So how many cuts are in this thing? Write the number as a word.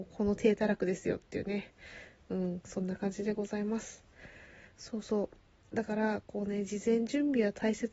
zero